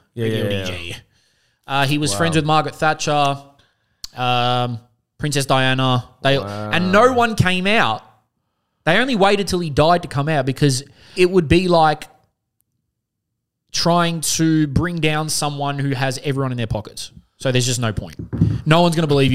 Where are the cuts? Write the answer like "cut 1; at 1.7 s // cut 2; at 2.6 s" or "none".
cut 1; at 11.2 s